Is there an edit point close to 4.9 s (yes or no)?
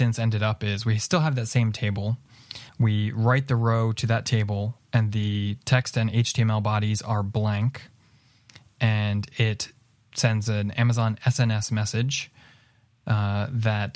no